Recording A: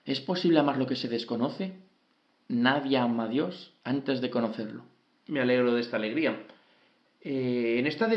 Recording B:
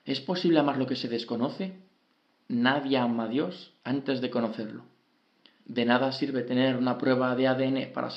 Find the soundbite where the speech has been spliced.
A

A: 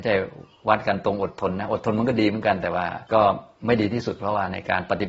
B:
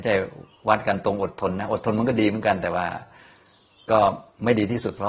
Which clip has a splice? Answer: A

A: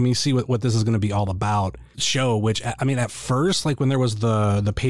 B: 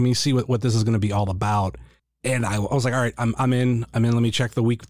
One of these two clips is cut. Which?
A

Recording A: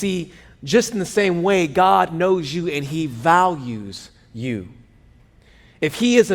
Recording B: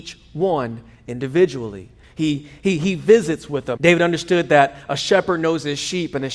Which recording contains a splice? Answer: B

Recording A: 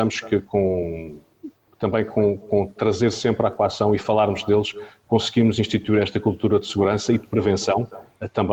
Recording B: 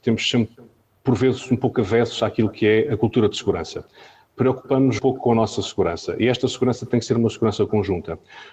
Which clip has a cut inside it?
B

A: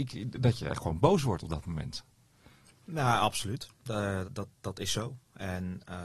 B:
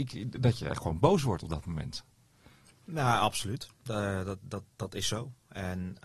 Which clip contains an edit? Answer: A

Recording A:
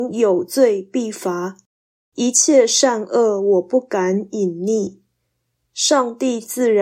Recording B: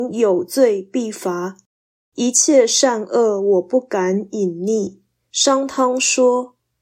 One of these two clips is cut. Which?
B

